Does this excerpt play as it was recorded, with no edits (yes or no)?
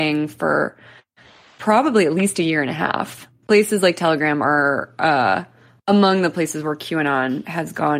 no